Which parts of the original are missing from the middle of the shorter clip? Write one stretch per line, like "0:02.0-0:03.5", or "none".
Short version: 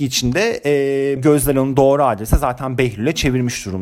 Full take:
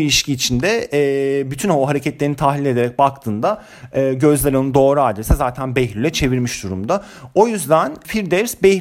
0:01.4-0:04.1

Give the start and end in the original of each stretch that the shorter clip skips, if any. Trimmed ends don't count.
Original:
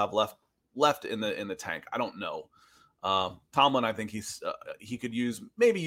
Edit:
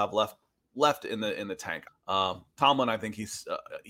0:01.9-0:02.8

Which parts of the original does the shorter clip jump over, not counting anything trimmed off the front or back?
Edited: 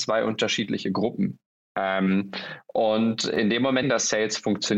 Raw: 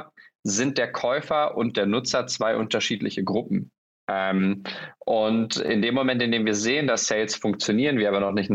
0:06.1-0:06.8

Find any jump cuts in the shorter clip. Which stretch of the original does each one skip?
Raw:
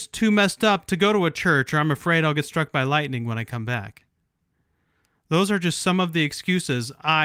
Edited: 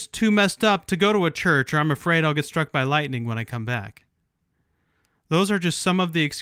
none

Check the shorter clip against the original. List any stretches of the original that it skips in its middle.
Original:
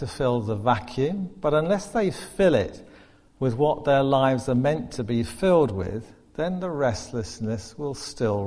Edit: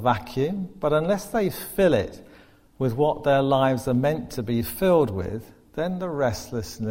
none

